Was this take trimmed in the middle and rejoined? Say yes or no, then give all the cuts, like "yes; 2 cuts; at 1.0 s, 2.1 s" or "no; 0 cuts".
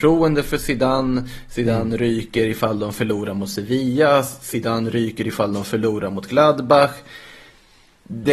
no; 0 cuts